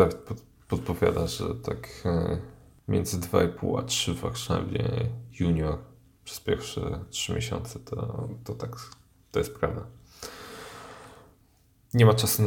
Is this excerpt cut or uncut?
uncut